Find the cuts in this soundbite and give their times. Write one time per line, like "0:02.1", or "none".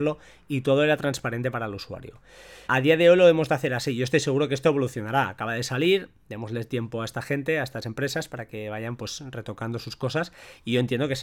0:02.7